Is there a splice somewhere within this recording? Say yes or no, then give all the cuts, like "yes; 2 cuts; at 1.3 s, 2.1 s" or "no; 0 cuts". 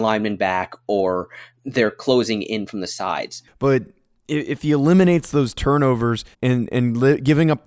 yes; 2 cuts; at 3.5 s, 6.3 s